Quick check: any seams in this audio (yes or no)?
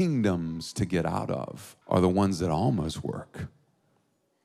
yes